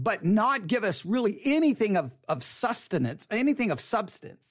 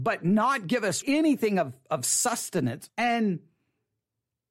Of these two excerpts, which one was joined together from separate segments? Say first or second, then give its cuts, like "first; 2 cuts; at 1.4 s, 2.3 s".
second; 2 cuts; at 1.0 s, 2.9 s